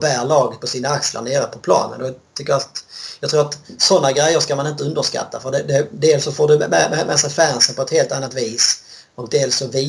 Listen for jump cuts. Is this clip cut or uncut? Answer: uncut